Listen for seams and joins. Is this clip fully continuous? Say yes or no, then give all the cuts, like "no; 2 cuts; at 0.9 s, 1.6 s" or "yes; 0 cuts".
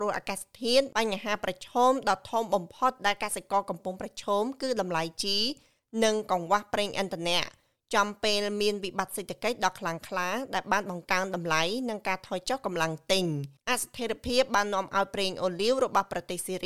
yes; 0 cuts